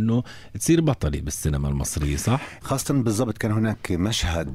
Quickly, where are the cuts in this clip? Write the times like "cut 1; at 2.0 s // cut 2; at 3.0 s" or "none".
cut 1; at 2.6 s